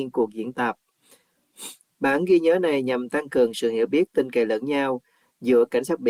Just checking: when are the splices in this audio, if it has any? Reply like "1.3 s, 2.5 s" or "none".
1.8 s